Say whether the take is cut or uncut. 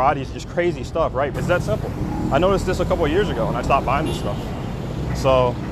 cut